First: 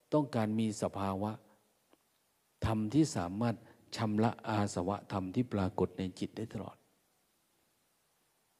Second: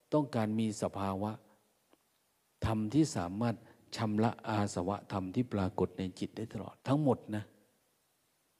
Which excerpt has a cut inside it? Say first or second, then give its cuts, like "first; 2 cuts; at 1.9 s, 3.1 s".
second; 1 cut; at 6.8 s